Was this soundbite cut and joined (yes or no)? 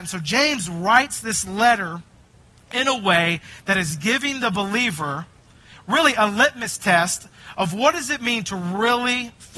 no